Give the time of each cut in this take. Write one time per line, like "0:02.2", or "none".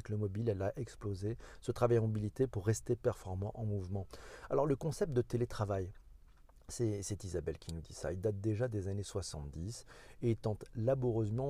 none

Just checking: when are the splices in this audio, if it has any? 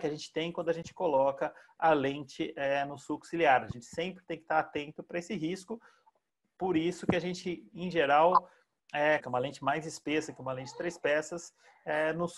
0:09.2

